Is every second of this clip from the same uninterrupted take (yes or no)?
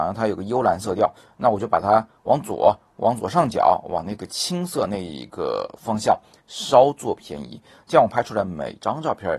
yes